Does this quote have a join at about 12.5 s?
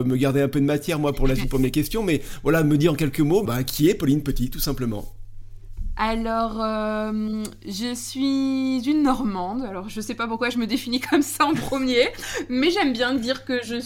no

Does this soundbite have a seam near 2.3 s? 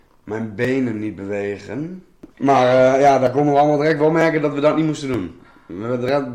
yes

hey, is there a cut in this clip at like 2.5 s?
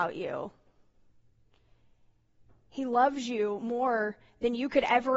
no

